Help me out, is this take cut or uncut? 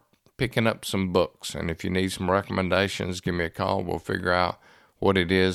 uncut